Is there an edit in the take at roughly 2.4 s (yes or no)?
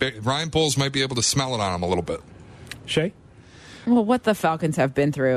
no